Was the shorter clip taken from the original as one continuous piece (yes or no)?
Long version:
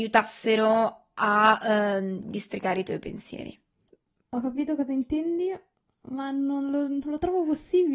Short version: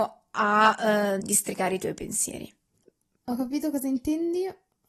no